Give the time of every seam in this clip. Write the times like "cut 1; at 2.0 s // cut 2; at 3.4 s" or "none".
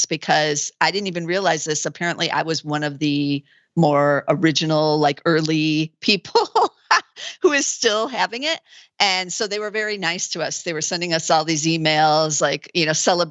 none